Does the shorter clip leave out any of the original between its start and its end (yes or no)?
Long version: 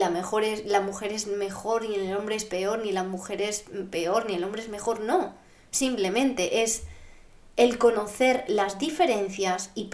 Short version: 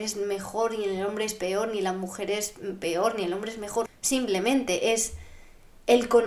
yes